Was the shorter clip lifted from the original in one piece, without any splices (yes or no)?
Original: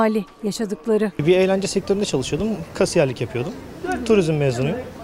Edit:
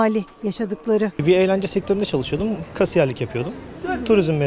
yes